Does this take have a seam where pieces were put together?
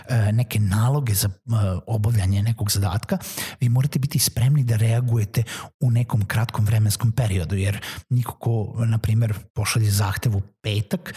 yes; 1 cut; at 9.5 s

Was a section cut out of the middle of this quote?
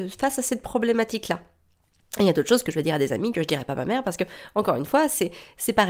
no; 0 cuts

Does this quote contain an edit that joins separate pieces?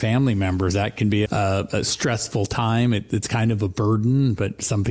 yes; 1 cut; at 1.3 s

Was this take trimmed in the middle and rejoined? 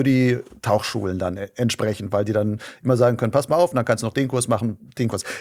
no; 0 cuts

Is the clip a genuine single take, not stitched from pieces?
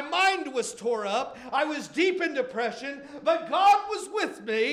yes; 0 cuts

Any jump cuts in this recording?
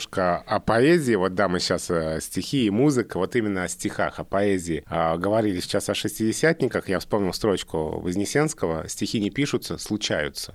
no; 0 cuts

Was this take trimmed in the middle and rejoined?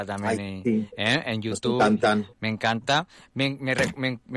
yes; 1 cut; at 2.3 s

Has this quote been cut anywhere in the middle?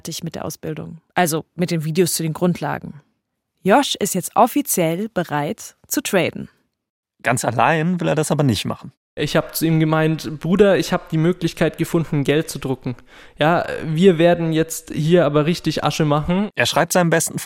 yes; 1 cut; at 1.1 s

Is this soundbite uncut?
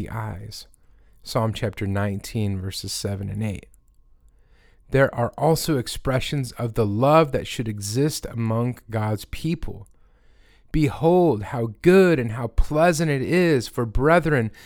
yes; 0 cuts

